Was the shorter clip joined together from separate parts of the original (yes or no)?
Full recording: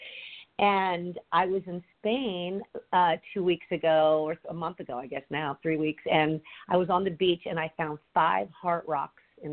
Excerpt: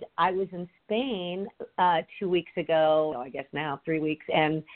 yes